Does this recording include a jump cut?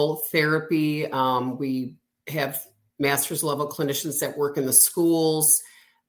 no; 0 cuts

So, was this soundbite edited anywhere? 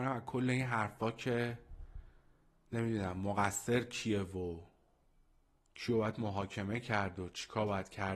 no; 0 cuts

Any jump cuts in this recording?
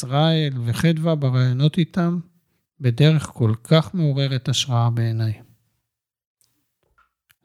no; 0 cuts

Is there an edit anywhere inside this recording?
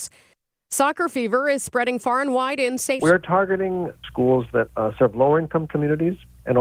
yes; 1 cut; at 3.0 s

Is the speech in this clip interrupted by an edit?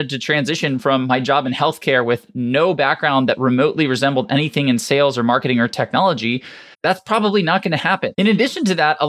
yes; 2 cuts; at 6.7 s, 8.1 s

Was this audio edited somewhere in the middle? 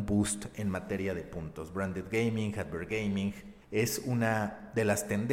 yes; 1 cut; at 3.6 s

